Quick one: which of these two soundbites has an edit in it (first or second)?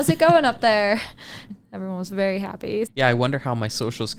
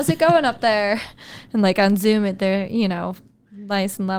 first